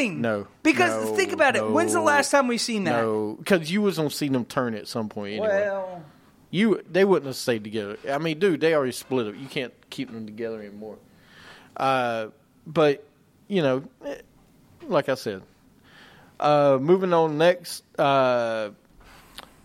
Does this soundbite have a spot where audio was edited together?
no; 0 cuts

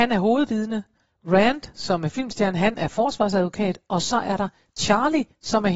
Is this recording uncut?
yes; 0 cuts

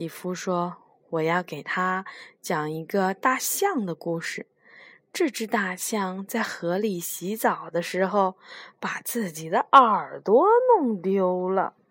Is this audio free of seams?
yes; 0 cuts

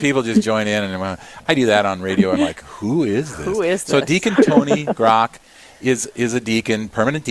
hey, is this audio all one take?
yes; 0 cuts

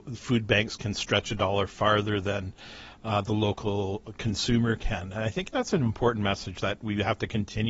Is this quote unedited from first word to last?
yes; 0 cuts

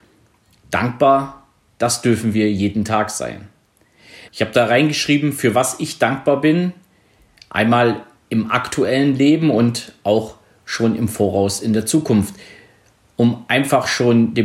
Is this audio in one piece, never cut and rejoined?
no; 1 cut; at 4.3 s

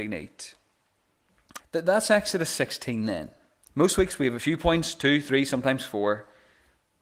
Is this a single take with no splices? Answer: no; 1 cut; at 1.6 s

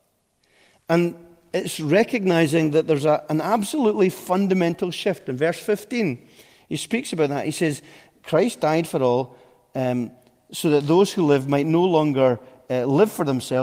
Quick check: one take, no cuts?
yes; 0 cuts

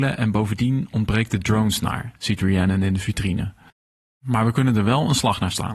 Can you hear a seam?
no; 0 cuts

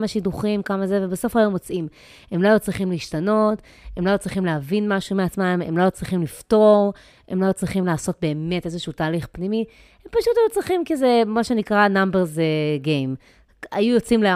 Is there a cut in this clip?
no; 0 cuts

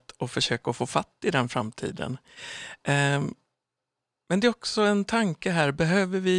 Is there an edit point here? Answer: no; 0 cuts

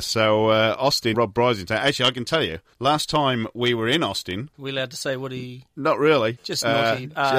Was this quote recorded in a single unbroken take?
no; 1 cut; at 1.1 s

